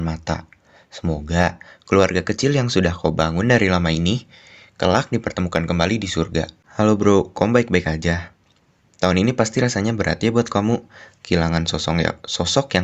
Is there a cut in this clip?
no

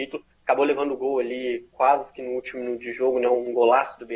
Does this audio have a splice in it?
no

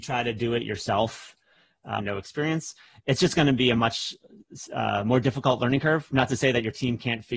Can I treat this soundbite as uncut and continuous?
no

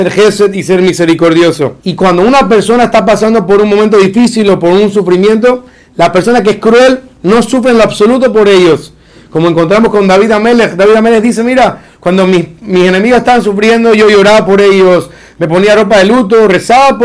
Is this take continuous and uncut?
no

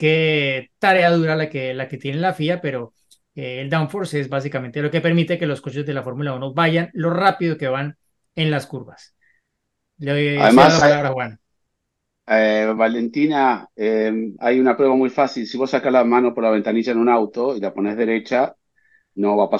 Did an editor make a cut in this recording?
no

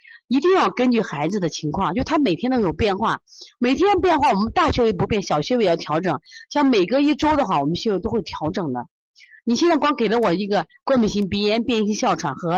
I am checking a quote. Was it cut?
no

